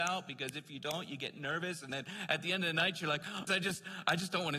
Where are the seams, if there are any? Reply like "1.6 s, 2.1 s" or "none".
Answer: 3.5 s

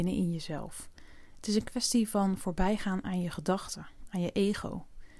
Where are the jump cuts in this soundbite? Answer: none

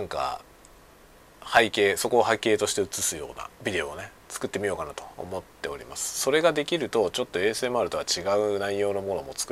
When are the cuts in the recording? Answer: 3.5 s

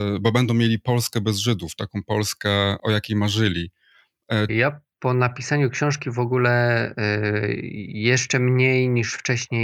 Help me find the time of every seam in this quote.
2.8 s, 4.5 s

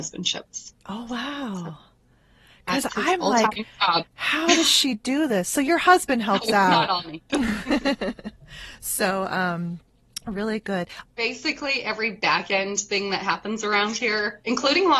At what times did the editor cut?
4.1 s, 7.3 s, 11.1 s

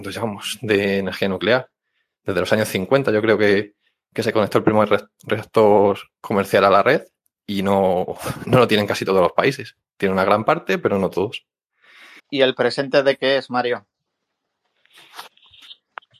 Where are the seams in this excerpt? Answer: 8.4 s, 12.2 s

